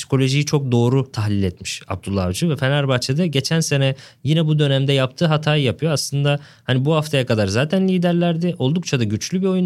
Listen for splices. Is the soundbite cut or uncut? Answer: uncut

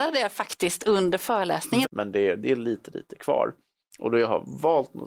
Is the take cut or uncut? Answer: cut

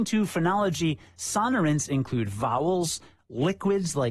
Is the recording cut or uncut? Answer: uncut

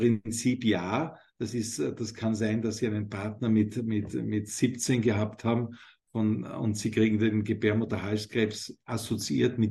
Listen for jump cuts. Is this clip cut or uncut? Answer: uncut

